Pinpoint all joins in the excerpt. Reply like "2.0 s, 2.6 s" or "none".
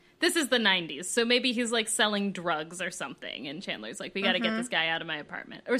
none